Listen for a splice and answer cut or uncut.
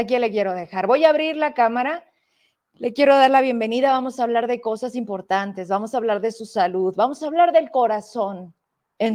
uncut